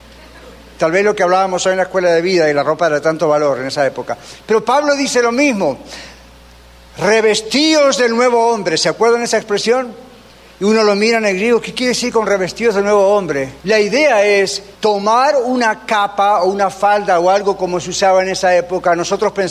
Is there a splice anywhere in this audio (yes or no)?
yes